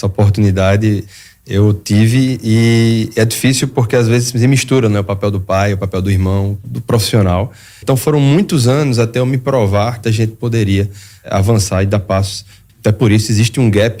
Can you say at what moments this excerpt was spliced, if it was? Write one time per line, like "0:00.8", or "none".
0:07.8
0:10.0
0:12.7